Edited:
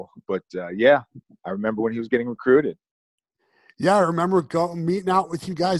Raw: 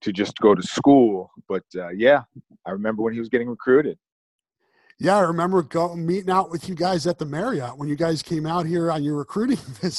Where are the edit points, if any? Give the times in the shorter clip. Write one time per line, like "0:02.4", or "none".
none